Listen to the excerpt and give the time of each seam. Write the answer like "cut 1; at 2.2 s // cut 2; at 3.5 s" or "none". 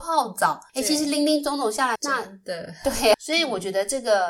cut 1; at 2.0 s // cut 2; at 3.1 s